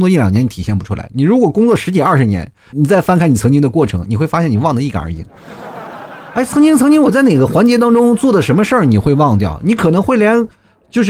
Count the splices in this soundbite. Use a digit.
1